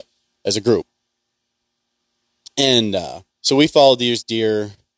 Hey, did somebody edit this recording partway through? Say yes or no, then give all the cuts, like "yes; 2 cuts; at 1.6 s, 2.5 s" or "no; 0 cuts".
yes; 1 cut; at 3.3 s